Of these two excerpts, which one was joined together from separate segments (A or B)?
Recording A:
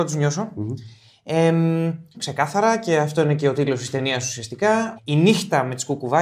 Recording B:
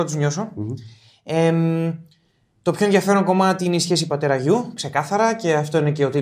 A